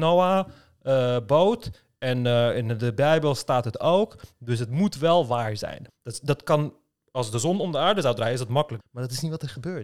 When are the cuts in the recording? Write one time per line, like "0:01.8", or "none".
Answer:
0:05.9
0:08.8